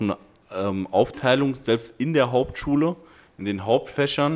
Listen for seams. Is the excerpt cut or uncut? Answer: uncut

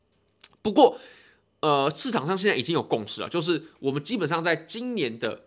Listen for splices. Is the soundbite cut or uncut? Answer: uncut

